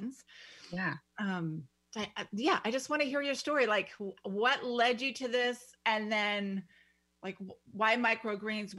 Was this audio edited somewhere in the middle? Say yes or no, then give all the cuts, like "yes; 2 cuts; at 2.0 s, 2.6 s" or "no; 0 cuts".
no; 0 cuts